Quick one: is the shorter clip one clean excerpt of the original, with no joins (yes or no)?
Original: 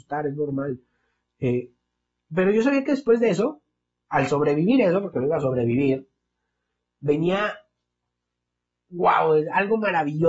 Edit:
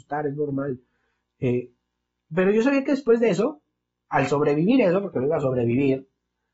yes